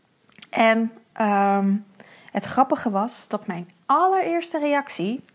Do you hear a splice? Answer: no; 0 cuts

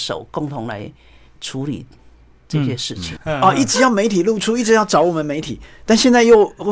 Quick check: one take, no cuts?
no; 1 cut; at 3.2 s

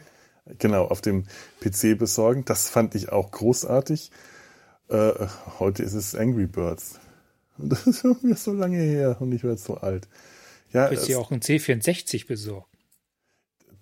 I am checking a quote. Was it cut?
no; 0 cuts

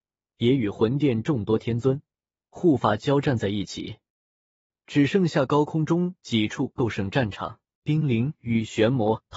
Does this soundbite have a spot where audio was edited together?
yes; 1 cut; at 7.8 s

